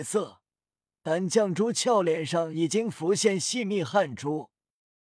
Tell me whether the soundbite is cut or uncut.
uncut